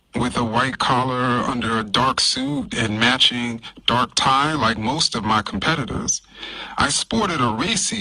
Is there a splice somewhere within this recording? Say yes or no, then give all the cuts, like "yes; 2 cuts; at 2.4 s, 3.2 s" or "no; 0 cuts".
no; 0 cuts